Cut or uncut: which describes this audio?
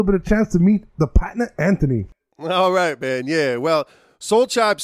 uncut